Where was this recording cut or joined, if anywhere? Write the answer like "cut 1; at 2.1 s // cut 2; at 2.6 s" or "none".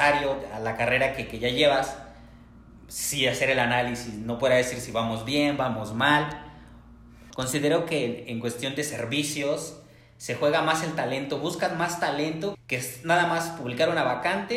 cut 1; at 7.3 s // cut 2; at 12.5 s